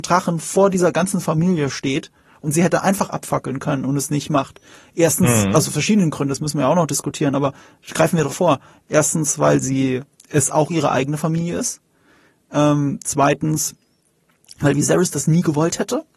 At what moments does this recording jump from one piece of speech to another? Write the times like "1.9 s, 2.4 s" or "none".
8.3 s